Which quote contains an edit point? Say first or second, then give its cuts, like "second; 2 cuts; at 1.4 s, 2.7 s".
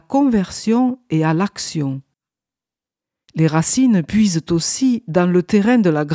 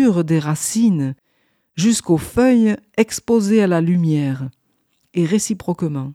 first; 1 cut; at 3.2 s